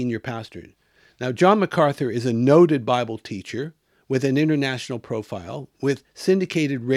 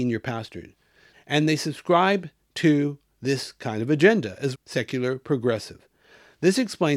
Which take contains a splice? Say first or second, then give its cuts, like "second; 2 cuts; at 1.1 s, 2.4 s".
second; 2 cuts; at 1.1 s, 4.5 s